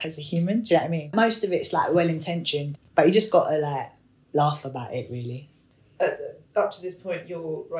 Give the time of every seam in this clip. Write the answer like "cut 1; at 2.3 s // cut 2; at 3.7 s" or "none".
cut 1; at 2.7 s